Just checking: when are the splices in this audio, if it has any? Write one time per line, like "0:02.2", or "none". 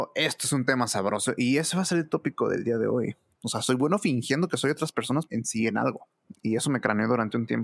0:03.3
0:05.3